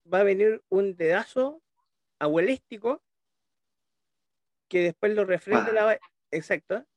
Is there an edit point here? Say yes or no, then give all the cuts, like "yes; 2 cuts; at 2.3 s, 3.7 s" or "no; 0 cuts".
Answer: no; 0 cuts